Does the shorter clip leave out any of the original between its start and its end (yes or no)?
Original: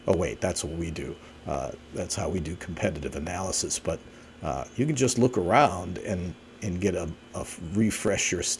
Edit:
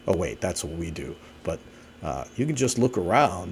yes